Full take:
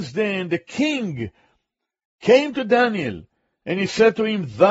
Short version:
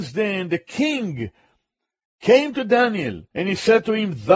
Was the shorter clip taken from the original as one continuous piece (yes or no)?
no